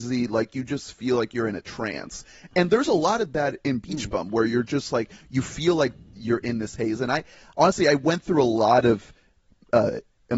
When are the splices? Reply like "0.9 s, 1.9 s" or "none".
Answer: none